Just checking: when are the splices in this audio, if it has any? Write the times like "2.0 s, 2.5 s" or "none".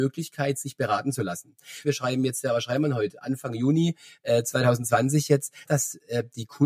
1.8 s, 5.7 s